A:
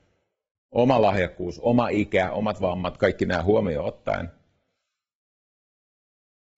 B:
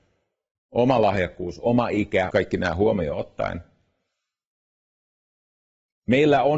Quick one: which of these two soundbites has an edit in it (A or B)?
B